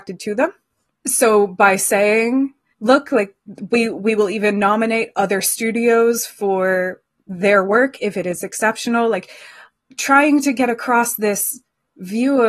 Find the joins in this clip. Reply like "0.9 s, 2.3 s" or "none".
none